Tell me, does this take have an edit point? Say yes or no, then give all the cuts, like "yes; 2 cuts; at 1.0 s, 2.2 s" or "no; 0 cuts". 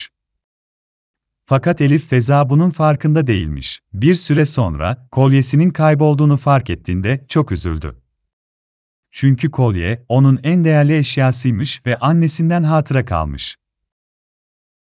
yes; 1 cut; at 3.8 s